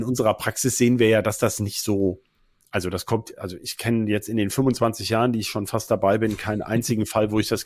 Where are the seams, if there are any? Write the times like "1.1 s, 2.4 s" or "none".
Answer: none